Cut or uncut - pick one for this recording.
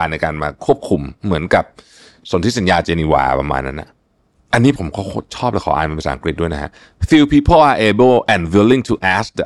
uncut